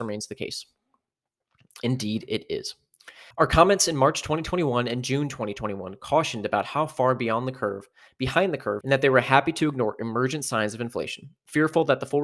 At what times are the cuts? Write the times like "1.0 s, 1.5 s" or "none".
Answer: 3.3 s, 8.8 s